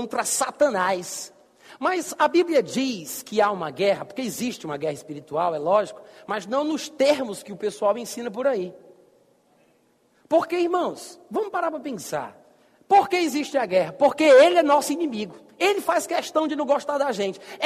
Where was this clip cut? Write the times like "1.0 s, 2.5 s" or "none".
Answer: none